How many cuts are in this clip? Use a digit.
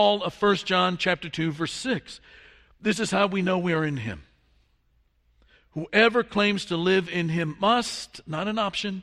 0